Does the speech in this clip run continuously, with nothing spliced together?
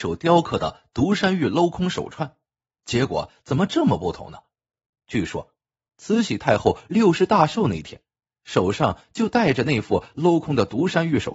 no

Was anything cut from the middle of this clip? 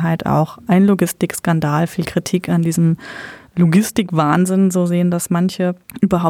no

